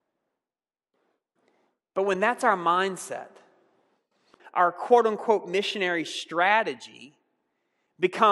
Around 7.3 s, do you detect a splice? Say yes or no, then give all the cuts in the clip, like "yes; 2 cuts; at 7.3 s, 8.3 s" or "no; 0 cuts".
no; 1 cut; at 4.4 s